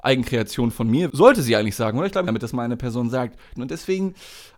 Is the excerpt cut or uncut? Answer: cut